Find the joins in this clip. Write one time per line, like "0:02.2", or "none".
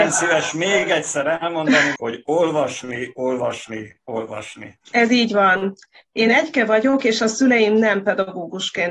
0:02.0
0:04.8